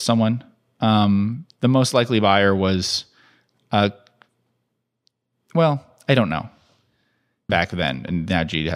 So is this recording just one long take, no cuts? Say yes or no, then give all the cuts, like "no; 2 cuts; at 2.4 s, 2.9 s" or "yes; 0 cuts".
no; 1 cut; at 7.5 s